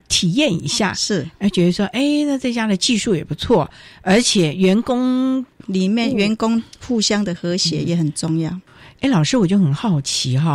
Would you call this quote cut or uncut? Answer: uncut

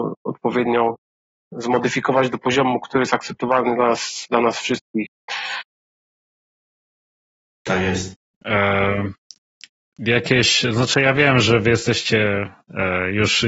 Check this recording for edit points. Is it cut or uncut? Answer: cut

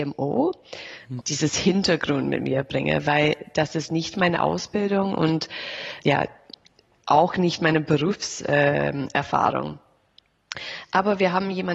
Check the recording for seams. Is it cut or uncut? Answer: cut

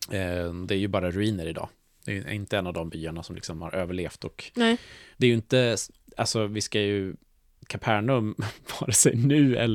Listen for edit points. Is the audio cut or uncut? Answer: cut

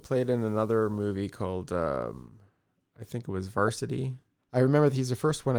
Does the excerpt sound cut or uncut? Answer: cut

